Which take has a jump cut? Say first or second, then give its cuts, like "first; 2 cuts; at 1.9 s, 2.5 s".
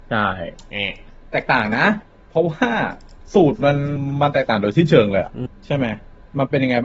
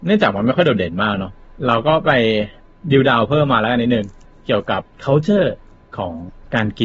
second; 1 cut; at 4.9 s